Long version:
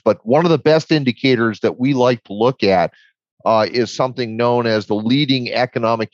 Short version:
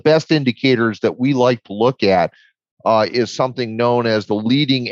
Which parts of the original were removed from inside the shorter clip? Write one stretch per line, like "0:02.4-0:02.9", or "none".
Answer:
none

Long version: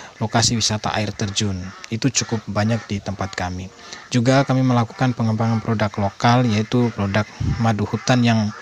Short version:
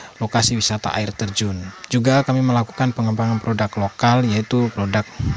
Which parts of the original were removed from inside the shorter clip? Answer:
0:01.9-0:04.1

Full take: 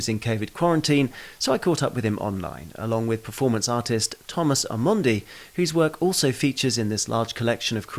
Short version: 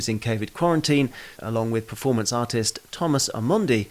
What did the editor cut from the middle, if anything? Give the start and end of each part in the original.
0:01.4-0:02.7

